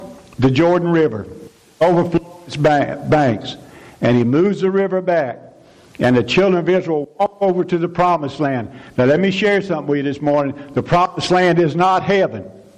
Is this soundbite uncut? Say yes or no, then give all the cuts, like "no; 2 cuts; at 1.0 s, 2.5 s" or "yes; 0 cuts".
yes; 0 cuts